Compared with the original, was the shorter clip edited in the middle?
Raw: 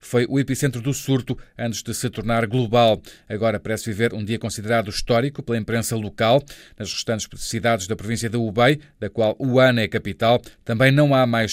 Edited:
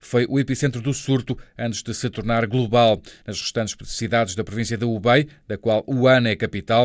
yes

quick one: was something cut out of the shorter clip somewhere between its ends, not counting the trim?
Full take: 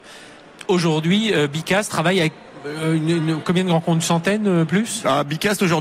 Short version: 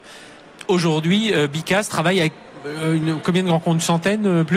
yes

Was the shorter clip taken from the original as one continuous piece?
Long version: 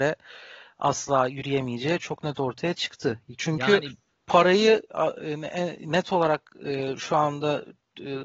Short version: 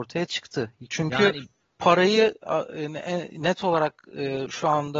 yes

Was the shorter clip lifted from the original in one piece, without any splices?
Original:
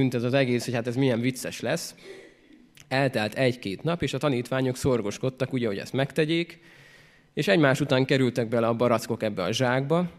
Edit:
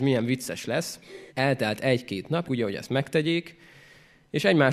no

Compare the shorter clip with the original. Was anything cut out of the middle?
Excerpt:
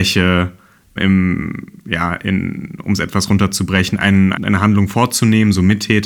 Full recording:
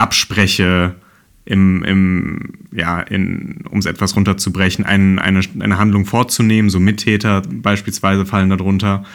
yes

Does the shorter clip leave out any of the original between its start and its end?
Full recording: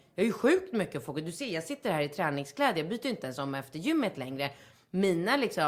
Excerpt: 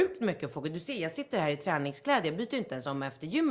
no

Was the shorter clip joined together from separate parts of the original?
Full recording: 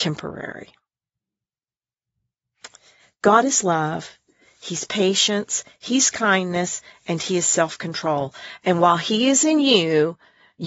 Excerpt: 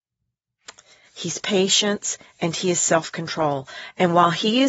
yes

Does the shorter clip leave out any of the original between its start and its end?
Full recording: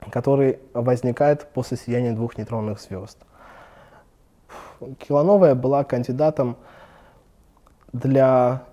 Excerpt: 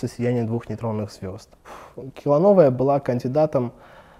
yes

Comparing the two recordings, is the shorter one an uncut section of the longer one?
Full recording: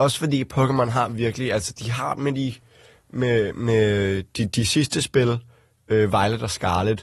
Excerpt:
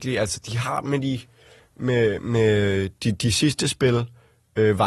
yes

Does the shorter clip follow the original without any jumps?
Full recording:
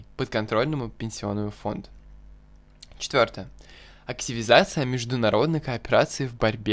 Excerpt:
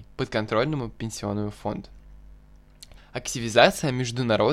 no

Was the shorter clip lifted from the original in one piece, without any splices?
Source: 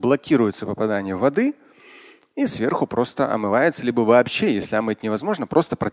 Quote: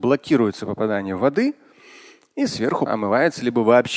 no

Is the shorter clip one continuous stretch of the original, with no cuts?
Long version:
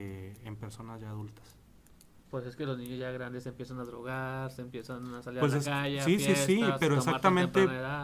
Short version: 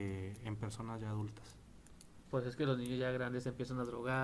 yes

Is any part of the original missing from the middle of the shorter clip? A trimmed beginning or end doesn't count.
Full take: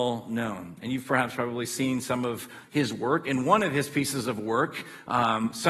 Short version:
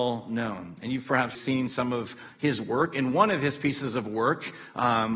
yes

